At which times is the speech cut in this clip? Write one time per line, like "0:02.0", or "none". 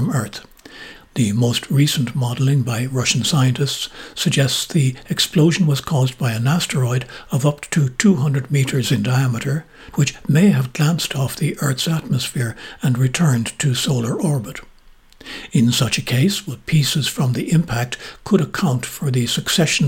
0:01.0
0:09.9